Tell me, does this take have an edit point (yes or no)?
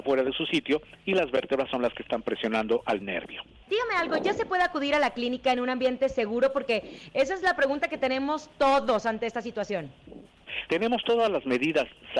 yes